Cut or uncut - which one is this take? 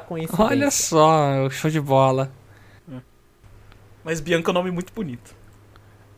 cut